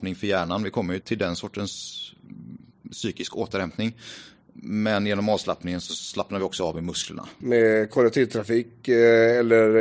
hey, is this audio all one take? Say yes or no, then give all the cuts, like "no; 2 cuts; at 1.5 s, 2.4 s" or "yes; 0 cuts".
no; 2 cuts; at 1.0 s, 7.4 s